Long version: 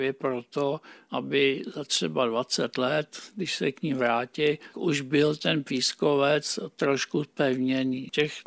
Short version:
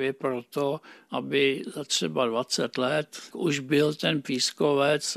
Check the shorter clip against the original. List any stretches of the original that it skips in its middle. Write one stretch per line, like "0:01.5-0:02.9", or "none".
0:03.3-0:04.7